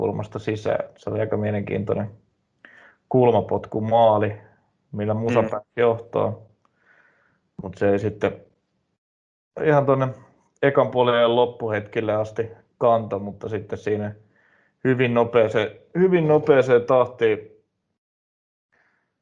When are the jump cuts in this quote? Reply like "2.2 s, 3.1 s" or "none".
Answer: none